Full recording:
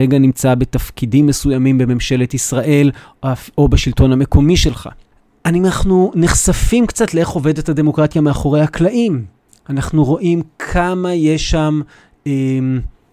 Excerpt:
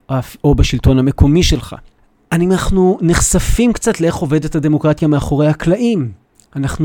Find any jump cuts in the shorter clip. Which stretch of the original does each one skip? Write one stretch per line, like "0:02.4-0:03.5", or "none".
none